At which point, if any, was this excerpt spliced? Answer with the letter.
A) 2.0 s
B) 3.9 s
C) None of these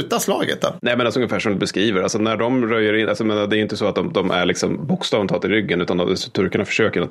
C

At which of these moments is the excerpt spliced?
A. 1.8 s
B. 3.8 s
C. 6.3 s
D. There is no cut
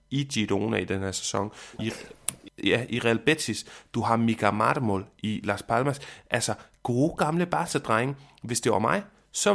A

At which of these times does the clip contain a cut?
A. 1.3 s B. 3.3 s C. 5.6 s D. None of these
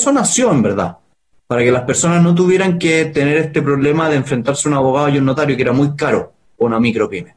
D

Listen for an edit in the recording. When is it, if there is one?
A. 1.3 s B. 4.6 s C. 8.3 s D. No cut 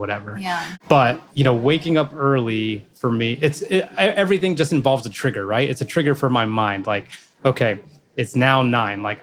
A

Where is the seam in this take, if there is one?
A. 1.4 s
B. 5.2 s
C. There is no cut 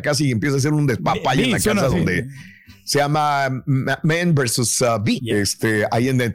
B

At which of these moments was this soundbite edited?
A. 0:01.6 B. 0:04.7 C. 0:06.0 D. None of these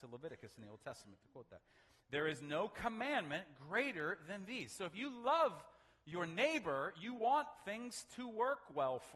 D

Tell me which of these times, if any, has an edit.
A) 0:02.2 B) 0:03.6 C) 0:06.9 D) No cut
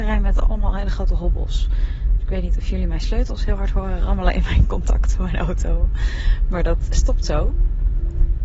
C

